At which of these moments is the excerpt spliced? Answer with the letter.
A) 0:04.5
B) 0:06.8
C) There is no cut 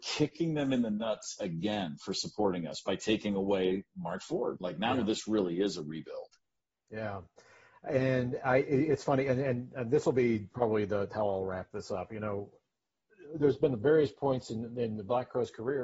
A